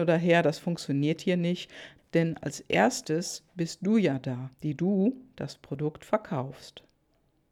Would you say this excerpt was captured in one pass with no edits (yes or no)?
no